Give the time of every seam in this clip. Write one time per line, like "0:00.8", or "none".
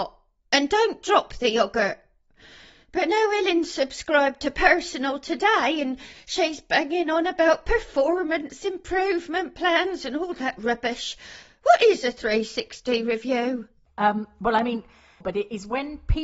0:15.2